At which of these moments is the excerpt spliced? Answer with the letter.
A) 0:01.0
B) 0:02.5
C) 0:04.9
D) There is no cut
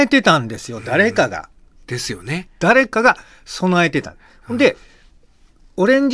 B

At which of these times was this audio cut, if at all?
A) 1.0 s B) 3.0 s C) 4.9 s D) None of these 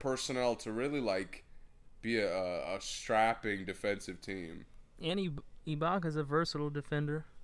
D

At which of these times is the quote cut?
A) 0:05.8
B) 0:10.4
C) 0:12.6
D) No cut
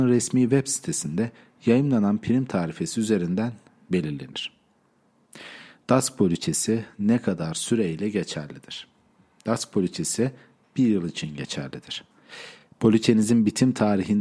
D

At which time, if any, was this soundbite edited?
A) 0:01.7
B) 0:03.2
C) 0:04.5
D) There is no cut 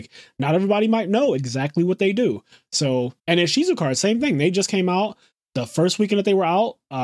B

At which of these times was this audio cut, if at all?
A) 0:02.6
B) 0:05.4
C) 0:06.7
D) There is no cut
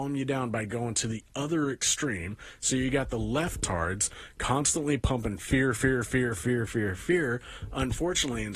C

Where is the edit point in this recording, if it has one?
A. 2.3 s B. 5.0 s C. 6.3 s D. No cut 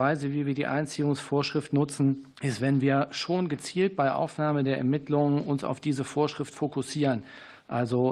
A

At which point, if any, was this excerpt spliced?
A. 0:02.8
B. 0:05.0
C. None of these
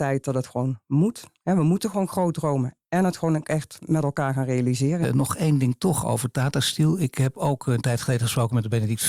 B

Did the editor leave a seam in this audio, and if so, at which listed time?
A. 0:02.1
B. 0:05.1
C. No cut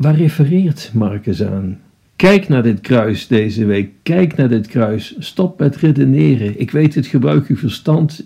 A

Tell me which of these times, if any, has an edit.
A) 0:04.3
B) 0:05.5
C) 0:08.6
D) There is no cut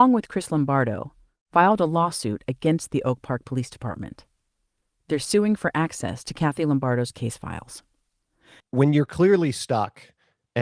C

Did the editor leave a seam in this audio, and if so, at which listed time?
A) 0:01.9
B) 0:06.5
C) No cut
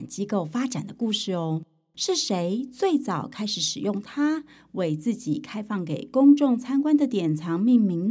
A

